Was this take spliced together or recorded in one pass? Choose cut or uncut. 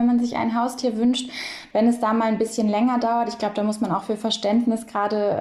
uncut